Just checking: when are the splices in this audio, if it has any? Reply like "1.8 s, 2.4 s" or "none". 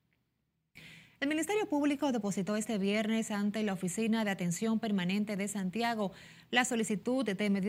none